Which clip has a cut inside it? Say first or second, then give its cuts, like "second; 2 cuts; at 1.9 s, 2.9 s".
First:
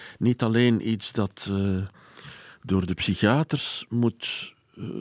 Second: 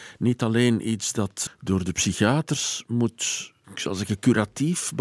second; 2 cuts; at 1.5 s, 3.6 s